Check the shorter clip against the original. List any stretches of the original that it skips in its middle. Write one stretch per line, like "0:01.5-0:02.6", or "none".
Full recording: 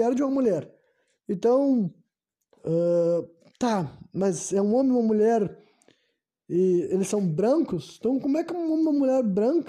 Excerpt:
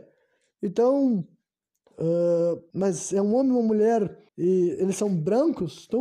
0:03.4-0:04.1
0:05.7-0:06.4